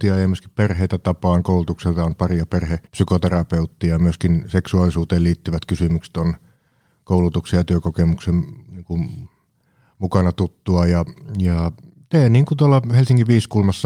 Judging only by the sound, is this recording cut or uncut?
cut